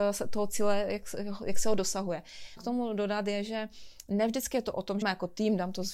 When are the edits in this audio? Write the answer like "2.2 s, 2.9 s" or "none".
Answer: 2.6 s, 5.0 s